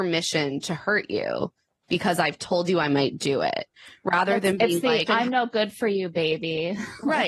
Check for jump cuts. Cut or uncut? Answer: cut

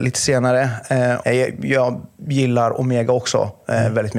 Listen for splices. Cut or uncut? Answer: cut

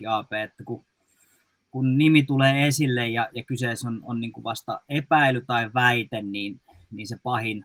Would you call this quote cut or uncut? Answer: uncut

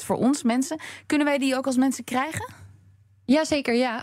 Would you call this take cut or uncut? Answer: uncut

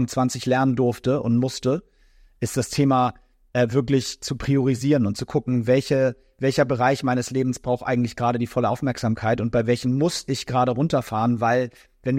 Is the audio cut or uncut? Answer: uncut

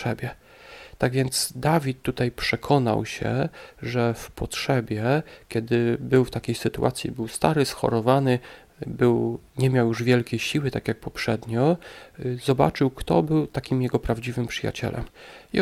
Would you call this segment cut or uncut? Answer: cut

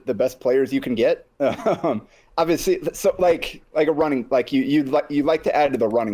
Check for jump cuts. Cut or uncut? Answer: uncut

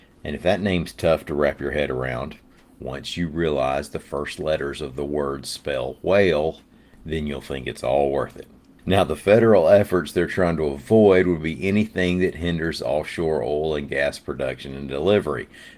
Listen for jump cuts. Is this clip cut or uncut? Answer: uncut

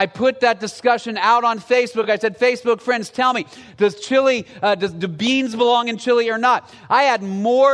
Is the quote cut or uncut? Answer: uncut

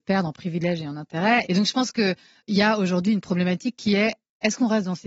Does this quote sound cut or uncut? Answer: cut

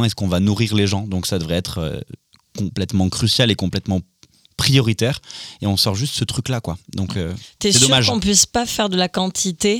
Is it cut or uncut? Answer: uncut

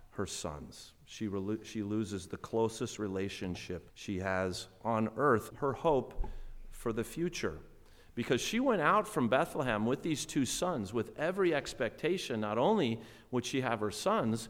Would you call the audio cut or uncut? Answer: cut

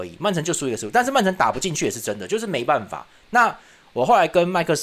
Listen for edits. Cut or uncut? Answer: uncut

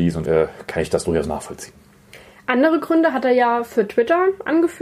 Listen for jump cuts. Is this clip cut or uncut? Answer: uncut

